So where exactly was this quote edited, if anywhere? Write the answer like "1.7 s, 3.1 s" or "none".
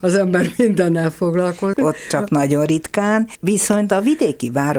1.7 s